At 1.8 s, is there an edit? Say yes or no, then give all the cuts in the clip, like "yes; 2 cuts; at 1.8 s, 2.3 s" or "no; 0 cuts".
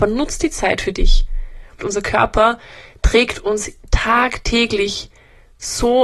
yes; 1 cut; at 1.8 s